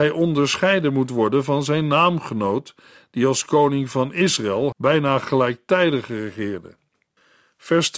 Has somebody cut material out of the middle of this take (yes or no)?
yes